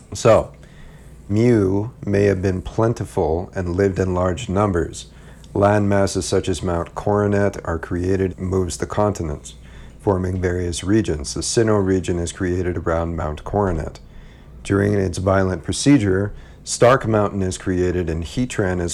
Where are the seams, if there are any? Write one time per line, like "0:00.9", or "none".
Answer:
0:01.3
0:08.3